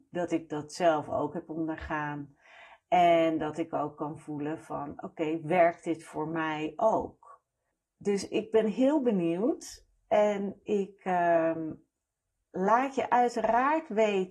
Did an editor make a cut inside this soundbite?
no; 0 cuts

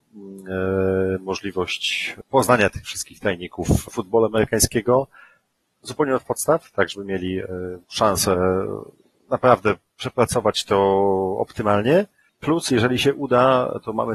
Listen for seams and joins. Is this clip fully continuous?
no; 1 cut; at 7.8 s

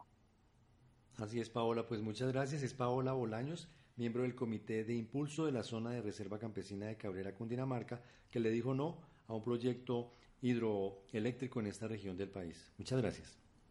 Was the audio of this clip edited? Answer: no; 0 cuts

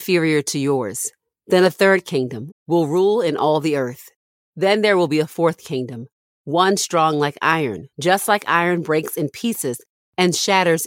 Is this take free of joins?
no; 2 cuts; at 2.5 s, 7.9 s

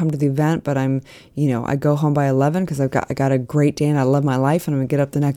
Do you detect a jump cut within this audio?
no; 0 cuts

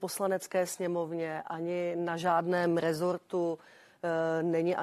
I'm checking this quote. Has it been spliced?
no; 0 cuts

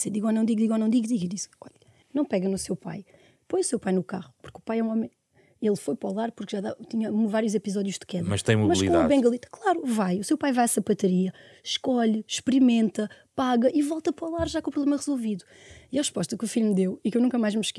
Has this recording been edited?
yes; 1 cut; at 2.0 s

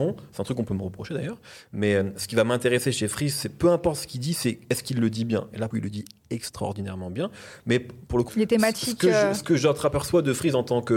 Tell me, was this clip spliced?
yes; 2 cuts; at 5.7 s, 8.3 s

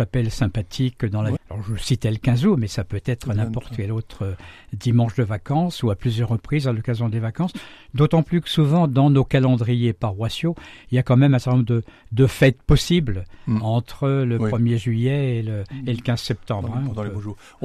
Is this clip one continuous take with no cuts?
no; 1 cut; at 1.4 s

